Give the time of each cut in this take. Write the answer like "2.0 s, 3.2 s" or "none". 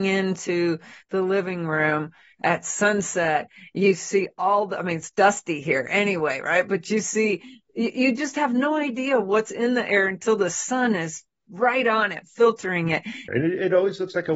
13.3 s